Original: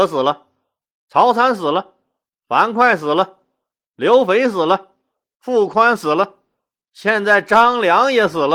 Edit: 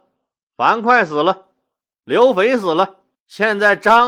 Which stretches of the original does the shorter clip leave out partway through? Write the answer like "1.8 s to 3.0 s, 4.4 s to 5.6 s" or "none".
5.1 s to 6.8 s

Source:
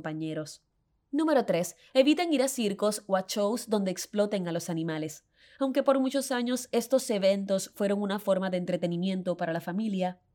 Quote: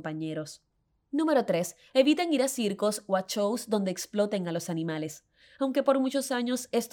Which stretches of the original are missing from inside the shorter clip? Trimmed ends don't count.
none

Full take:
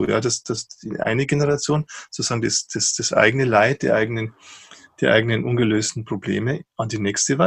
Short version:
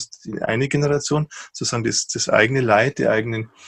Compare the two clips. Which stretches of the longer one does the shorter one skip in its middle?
2.7 s to 2.9 s

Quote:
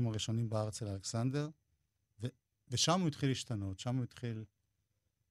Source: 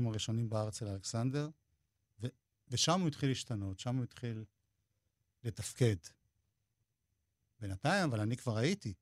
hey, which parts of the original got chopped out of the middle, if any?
none

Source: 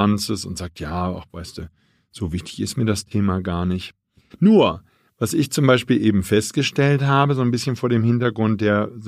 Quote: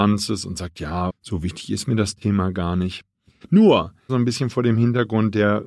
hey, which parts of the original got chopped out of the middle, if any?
1.1 s to 2.0 s, 5.0 s to 7.4 s

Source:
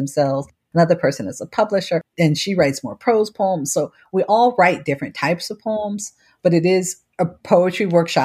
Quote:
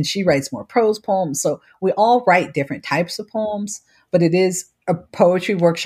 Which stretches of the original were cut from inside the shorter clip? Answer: none

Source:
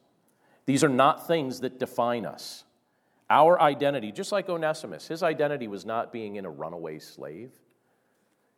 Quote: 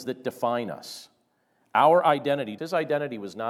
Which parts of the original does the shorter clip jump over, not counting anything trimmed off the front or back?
4.1 s to 5.1 s

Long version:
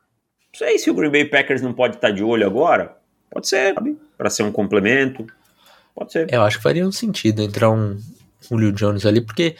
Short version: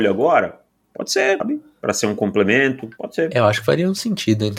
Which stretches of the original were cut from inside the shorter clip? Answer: 5.3 s to 5.9 s

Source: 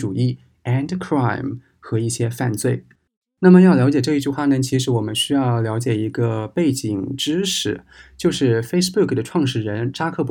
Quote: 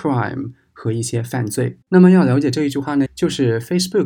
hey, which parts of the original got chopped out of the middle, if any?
2.9 s to 3.3 s, 4.6 s to 8.1 s

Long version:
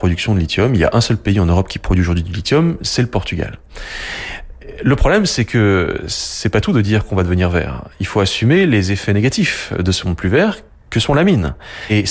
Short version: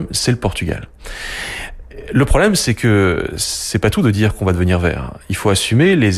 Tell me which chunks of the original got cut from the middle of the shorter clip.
none

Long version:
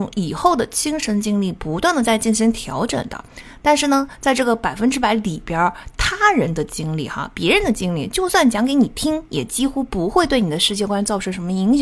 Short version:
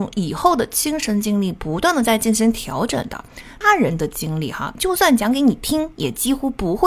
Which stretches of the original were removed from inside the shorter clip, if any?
3.6 s to 6.2 s, 7.3 s to 8.1 s

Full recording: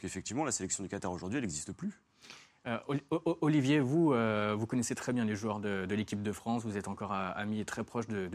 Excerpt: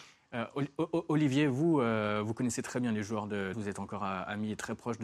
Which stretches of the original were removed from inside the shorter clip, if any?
5.9 s to 6.6 s

